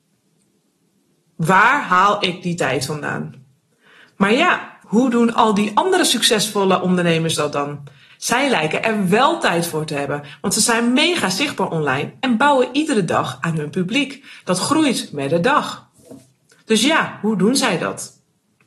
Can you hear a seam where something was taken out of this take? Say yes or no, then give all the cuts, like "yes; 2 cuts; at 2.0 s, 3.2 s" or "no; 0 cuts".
yes; 1 cut; at 4.8 s